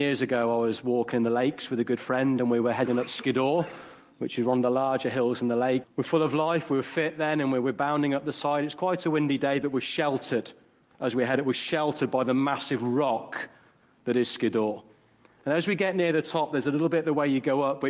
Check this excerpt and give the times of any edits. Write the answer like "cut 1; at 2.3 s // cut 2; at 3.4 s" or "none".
cut 1; at 5.8 s